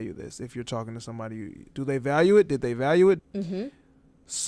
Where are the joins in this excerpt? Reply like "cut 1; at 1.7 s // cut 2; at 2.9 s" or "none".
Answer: cut 1; at 1.7 s // cut 2; at 3.2 s